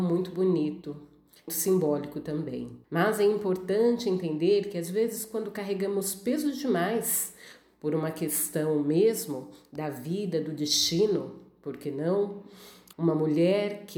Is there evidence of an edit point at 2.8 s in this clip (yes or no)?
yes